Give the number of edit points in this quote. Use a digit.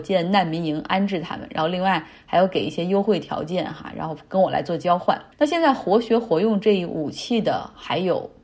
1